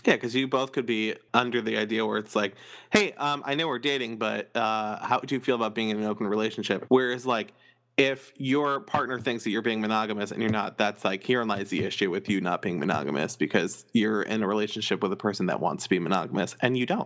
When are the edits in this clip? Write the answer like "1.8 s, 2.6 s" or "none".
1.3 s, 6.9 s